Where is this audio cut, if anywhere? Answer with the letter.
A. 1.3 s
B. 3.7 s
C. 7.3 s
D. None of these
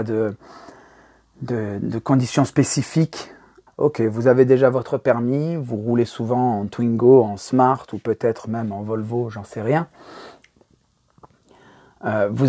B